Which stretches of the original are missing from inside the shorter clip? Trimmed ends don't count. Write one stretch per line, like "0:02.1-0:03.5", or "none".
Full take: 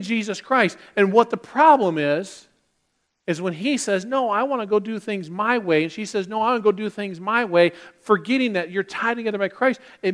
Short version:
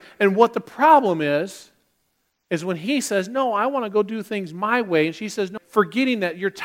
0:06.3-0:07.9